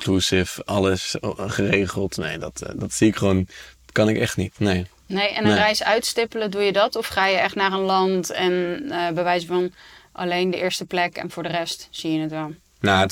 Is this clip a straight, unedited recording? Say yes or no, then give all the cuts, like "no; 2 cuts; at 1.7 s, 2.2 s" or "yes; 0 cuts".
yes; 0 cuts